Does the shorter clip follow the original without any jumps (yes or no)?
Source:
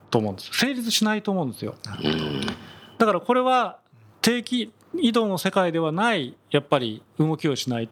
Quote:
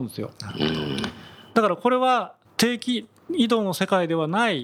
no